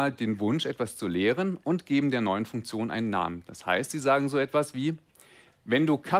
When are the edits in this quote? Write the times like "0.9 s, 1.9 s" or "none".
none